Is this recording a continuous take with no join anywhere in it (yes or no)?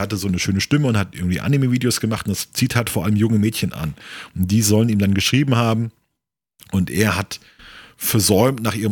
yes